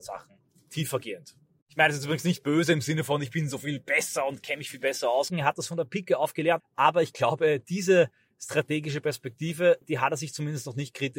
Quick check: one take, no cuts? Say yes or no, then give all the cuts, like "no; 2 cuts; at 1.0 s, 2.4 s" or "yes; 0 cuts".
no; 3 cuts; at 5.3 s, 6.6 s, 9.8 s